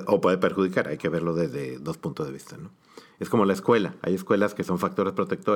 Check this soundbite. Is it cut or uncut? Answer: uncut